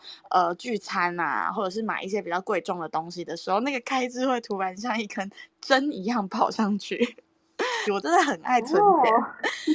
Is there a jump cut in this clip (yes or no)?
yes